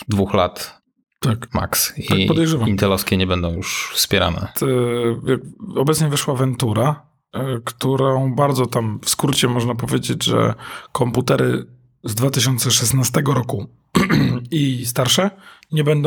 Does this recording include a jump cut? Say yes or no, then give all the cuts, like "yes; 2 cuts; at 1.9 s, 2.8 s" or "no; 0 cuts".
yes; 1 cut; at 4.5 s